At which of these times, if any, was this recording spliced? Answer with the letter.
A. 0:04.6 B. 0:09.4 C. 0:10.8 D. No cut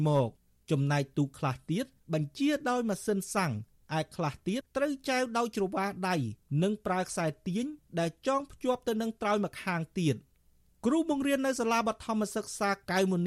A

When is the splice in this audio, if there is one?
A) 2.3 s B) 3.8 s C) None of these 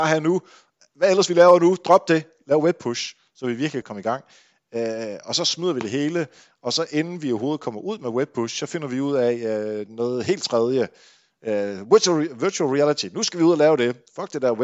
B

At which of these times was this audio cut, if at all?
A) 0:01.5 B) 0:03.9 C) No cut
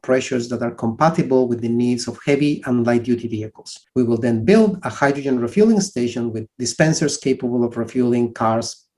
B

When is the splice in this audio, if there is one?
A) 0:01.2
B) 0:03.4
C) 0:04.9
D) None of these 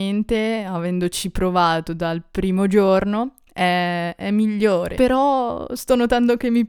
C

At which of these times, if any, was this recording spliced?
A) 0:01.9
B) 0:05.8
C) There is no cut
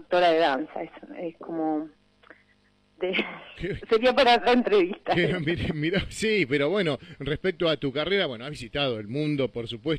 C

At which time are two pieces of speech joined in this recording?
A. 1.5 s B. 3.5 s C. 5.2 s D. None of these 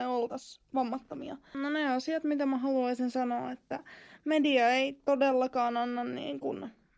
A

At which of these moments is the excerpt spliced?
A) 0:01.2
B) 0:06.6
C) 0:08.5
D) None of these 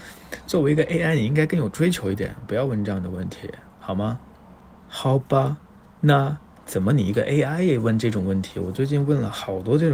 B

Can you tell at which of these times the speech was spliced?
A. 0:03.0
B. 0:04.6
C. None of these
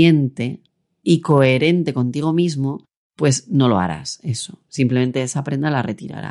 C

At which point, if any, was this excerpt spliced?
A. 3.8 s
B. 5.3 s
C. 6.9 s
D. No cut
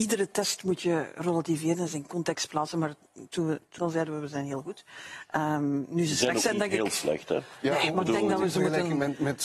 A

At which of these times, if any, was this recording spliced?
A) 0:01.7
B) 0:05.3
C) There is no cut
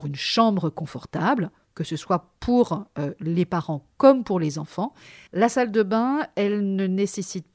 B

